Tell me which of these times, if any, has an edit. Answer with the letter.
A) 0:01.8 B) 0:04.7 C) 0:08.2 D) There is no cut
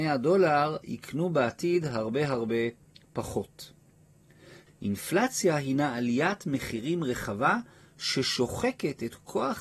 B